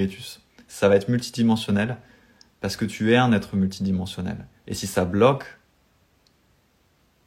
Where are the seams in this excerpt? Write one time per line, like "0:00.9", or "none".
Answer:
none